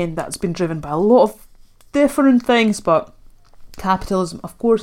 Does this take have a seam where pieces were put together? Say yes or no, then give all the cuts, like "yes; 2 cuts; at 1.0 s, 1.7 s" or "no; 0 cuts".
no; 0 cuts